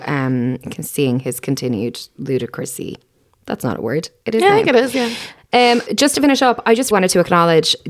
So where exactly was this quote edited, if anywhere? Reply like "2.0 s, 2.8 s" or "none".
5.9 s, 6.9 s